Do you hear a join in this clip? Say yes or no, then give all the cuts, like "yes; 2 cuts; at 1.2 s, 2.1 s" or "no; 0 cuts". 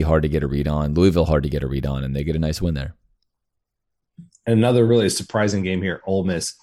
no; 0 cuts